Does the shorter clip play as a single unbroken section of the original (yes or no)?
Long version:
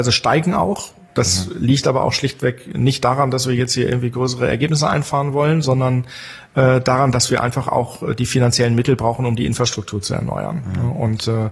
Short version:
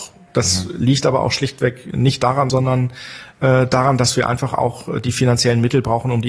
no